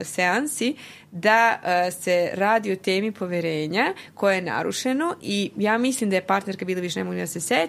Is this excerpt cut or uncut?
uncut